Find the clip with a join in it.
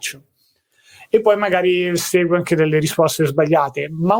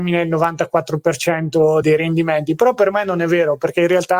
second; 1 cut; at 1.8 s

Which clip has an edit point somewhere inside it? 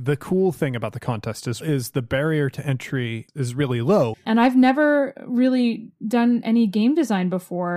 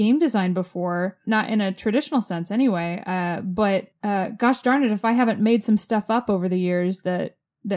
first; 2 cuts; at 1.6 s, 4.1 s

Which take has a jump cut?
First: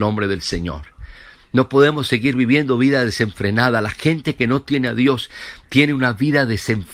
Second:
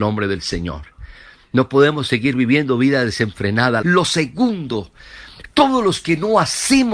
second; 1 cut; at 3.8 s

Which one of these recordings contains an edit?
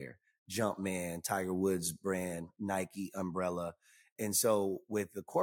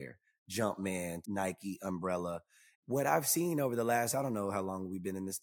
second; 2 cuts; at 1.2 s, 2.7 s

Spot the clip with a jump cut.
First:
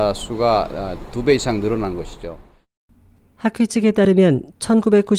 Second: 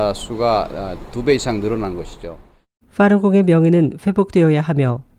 second; 1 cut; at 2.8 s

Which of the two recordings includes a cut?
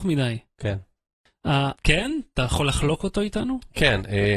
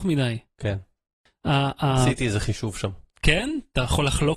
first; 1 cut; at 1.8 s

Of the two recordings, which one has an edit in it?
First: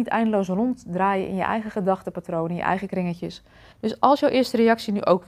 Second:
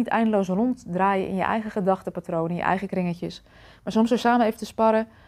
first; 1 cut; at 3.7 s

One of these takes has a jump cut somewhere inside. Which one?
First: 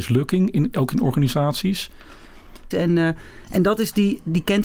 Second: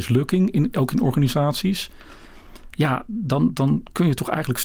first; 1 cut; at 2.7 s

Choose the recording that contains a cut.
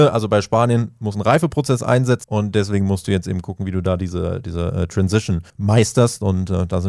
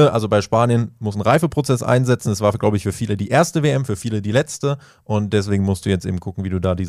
first; 2 cuts; at 2.2 s, 5.5 s

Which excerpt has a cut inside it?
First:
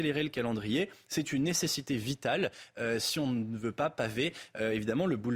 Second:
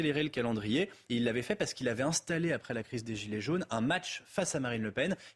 second; 1 cut; at 1.1 s

